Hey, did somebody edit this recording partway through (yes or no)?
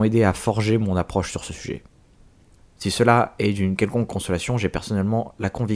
yes